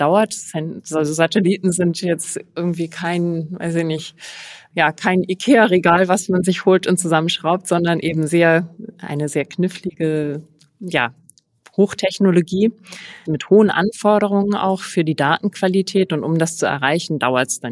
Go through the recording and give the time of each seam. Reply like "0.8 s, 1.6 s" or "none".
13.3 s